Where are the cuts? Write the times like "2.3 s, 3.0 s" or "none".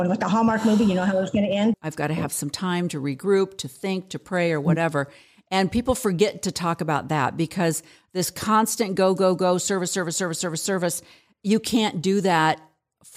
1.7 s